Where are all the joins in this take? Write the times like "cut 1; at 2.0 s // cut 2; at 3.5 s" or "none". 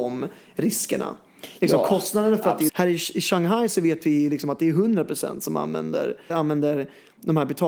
cut 1; at 2.7 s // cut 2; at 6.3 s